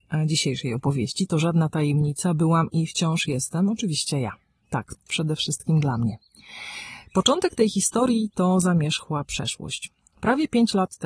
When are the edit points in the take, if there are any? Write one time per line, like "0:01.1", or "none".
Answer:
0:05.0